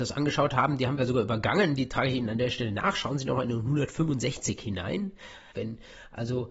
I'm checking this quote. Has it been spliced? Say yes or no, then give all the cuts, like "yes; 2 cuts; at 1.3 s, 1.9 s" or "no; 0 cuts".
yes; 1 cut; at 5.5 s